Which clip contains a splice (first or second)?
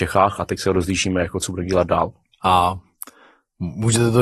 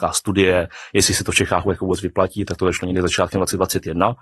first